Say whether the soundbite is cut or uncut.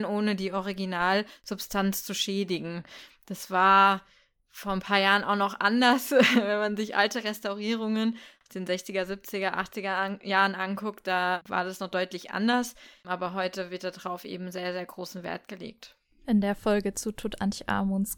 uncut